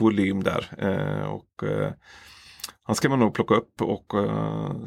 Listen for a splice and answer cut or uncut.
cut